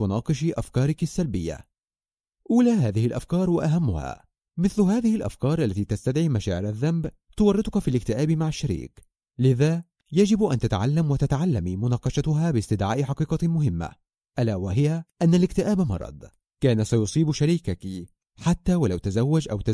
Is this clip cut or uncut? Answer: cut